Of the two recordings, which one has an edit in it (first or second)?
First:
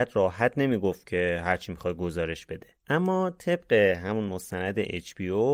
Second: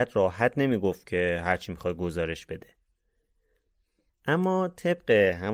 first